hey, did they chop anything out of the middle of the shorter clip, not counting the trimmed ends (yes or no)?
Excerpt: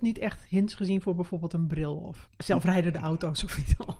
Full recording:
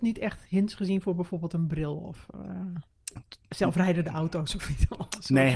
yes